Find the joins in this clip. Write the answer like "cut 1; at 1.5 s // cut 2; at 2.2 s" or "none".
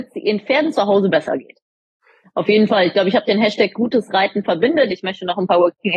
cut 1; at 2.2 s // cut 2; at 4.9 s